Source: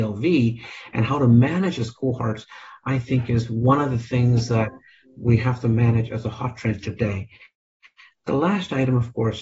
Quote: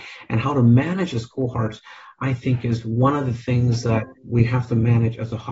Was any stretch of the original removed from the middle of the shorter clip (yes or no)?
yes